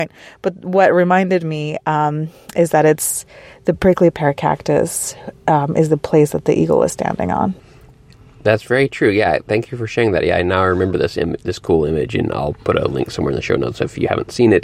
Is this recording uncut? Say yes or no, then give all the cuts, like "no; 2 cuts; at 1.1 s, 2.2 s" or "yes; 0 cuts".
yes; 0 cuts